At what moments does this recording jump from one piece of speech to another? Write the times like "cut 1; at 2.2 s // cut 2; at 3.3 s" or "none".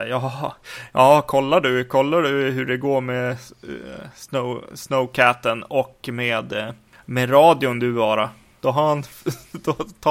cut 1; at 8.6 s

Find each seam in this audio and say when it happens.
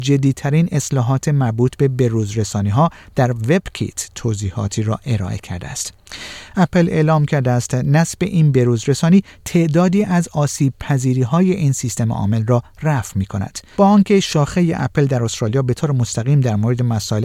cut 1; at 6.5 s // cut 2; at 13.7 s

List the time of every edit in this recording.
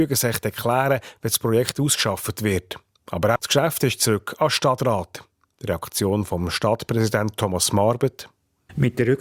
cut 1; at 3.4 s

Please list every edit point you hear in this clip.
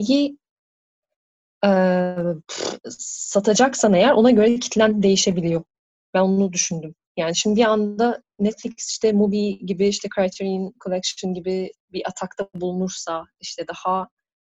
cut 1; at 6.1 s // cut 2; at 11.8 s

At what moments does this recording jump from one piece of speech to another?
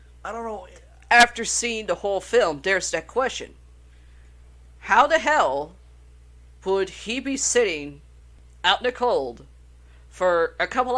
none

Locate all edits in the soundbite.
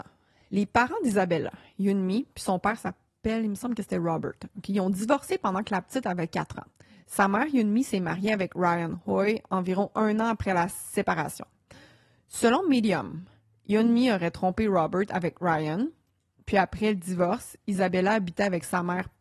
none

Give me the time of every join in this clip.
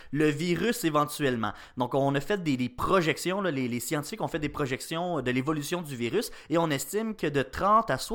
none

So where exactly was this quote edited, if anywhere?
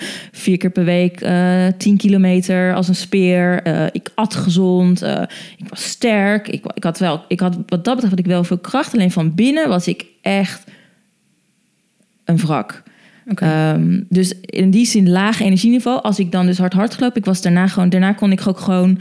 none

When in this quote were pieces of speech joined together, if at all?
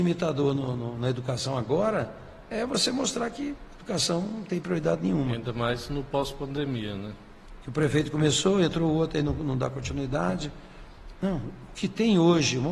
cut 1; at 7.6 s // cut 2; at 11.1 s

